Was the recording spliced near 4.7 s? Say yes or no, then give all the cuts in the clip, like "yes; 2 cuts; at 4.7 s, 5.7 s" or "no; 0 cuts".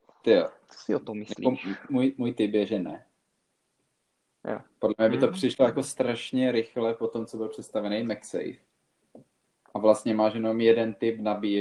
no; 1 cut; at 1.9 s